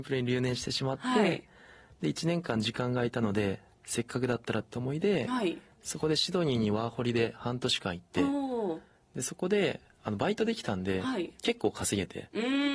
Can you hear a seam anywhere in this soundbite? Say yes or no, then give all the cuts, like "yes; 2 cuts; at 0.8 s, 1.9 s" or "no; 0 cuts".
no; 0 cuts